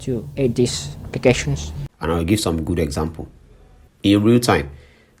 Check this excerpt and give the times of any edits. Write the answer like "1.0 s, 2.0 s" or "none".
1.9 s, 3.9 s